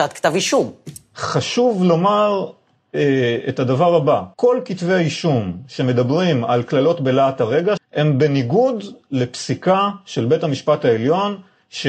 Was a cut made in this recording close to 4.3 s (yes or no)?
yes